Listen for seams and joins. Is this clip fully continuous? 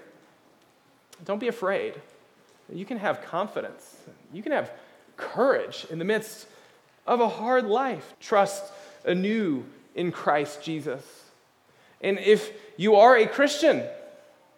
no; 1 cut; at 8.1 s

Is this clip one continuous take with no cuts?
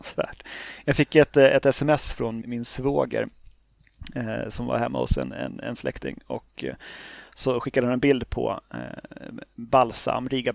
no; 1 cut; at 2.4 s

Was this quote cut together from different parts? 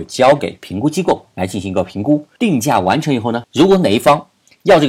yes; 2 cuts; at 2.4 s, 3.4 s

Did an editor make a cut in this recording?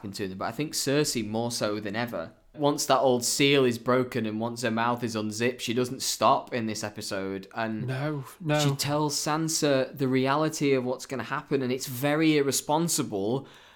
yes; 1 cut; at 2.5 s

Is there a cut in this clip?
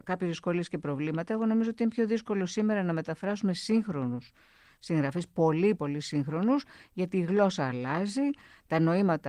yes; 1 cut; at 5.7 s

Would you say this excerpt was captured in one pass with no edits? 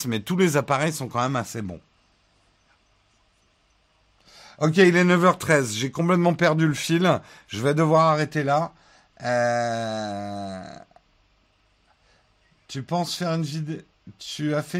yes; 0 cuts

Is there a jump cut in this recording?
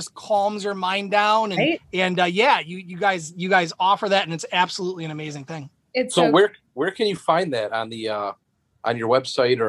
yes; 1 cut; at 1.7 s

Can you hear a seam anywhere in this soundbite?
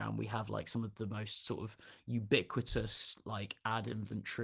no; 0 cuts

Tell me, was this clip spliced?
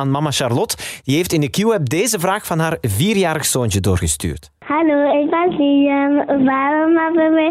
no; 0 cuts

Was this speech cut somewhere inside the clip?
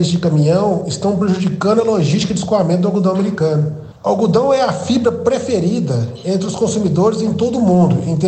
yes; 1 cut; at 3.9 s

